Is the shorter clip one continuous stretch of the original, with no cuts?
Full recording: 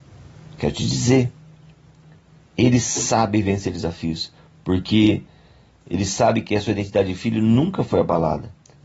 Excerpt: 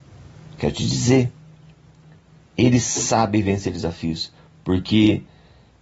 yes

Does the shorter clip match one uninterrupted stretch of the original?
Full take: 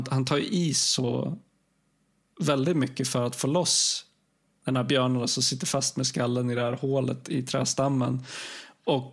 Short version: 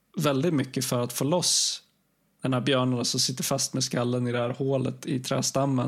yes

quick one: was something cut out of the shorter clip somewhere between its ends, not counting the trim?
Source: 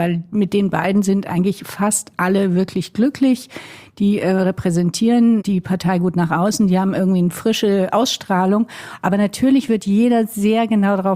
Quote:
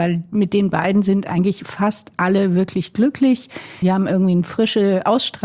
yes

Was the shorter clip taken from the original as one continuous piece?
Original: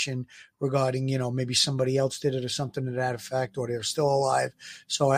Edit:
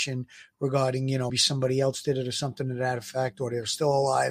no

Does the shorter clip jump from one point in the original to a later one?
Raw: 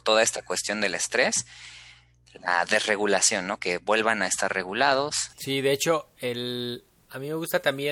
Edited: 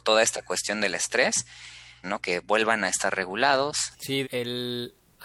yes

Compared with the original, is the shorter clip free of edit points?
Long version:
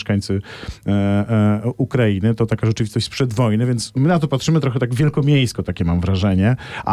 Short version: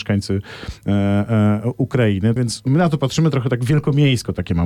no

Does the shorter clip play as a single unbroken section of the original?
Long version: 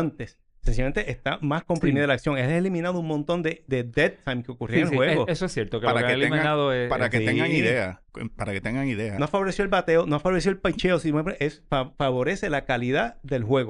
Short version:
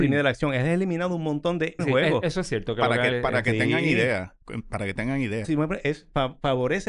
no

